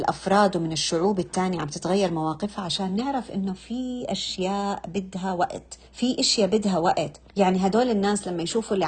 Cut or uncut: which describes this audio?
cut